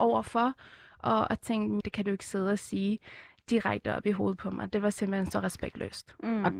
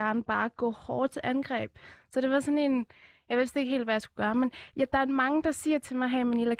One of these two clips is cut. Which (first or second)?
first